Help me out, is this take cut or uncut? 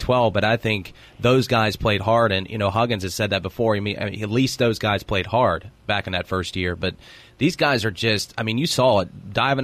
uncut